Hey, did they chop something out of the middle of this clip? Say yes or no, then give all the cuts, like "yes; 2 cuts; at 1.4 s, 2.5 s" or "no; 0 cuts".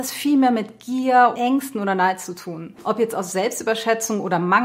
yes; 1 cut; at 1.3 s